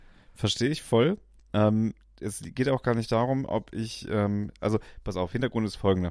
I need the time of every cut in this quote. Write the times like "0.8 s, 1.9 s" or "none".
none